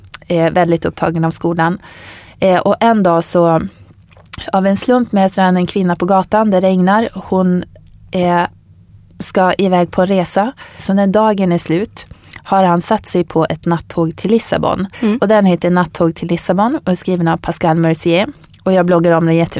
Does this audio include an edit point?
yes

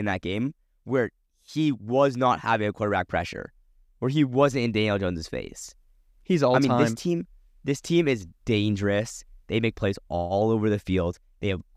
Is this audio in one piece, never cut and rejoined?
yes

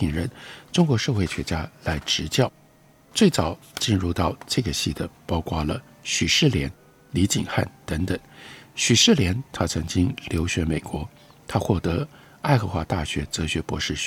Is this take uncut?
yes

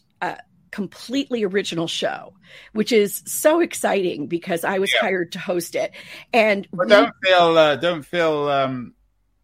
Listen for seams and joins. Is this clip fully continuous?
yes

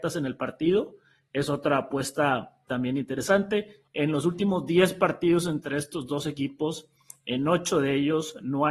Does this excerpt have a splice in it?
no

